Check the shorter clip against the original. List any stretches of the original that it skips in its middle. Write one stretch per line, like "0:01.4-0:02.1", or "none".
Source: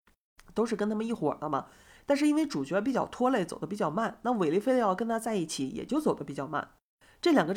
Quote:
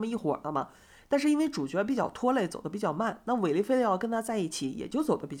none